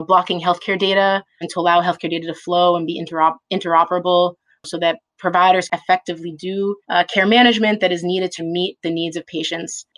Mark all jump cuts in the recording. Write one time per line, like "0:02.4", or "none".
0:01.4
0:06.8
0:08.4